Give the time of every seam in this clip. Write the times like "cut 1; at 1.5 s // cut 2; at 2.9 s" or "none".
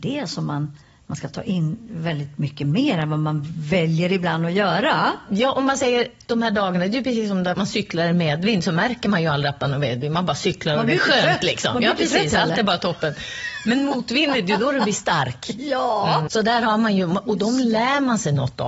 cut 1; at 7.5 s // cut 2; at 16.3 s